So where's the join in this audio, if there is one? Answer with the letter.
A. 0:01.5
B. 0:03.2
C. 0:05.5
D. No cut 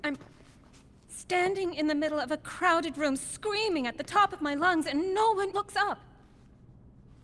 C